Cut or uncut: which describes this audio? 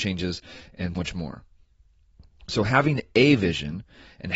cut